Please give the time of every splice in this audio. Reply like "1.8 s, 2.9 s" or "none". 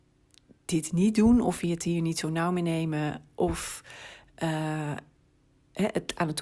none